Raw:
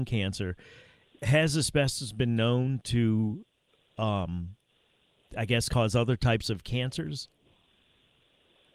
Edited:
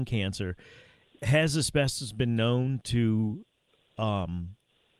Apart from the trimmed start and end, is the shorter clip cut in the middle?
no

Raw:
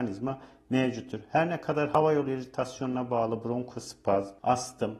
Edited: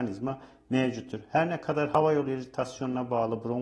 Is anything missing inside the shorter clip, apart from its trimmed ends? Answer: no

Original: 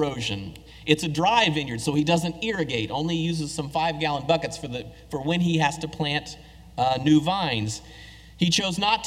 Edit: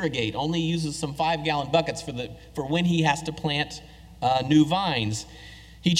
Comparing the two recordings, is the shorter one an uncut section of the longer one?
yes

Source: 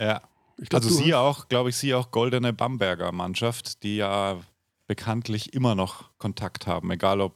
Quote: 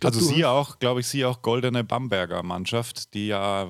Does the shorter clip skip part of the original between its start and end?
no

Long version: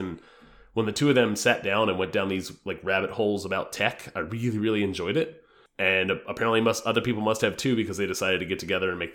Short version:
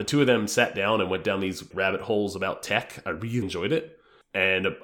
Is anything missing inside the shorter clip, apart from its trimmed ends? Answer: yes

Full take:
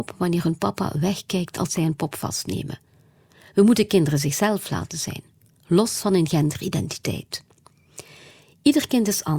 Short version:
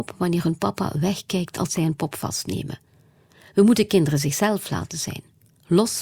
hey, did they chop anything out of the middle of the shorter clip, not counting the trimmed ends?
no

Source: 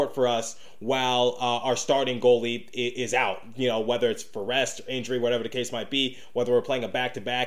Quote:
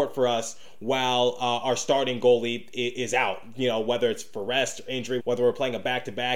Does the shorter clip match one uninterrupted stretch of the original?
no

